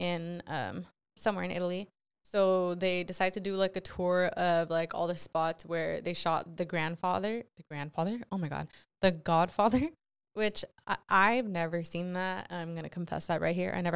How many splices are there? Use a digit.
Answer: 1